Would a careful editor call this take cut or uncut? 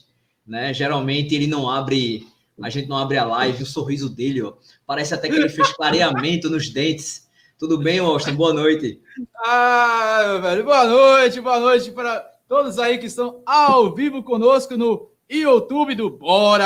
cut